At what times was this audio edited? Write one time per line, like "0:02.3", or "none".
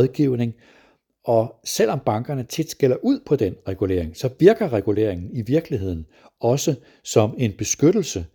none